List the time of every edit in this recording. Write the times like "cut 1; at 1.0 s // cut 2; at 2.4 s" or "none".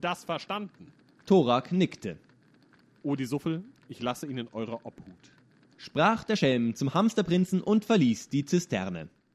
none